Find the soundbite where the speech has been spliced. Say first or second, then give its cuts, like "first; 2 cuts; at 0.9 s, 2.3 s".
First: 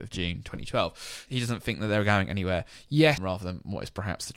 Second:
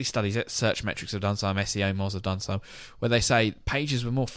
first; 2 cuts; at 1.3 s, 3.2 s